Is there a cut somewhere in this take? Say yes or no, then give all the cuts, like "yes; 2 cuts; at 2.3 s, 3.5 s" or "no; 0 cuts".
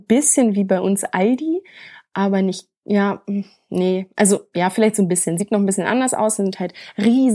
no; 0 cuts